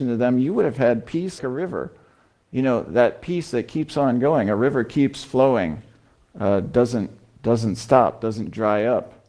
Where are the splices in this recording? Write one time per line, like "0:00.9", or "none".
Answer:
0:01.4